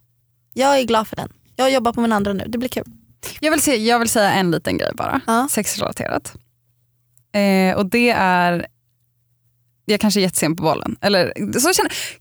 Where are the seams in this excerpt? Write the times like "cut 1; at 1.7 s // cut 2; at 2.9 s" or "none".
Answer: none